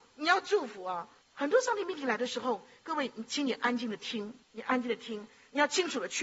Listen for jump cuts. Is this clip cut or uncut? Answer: cut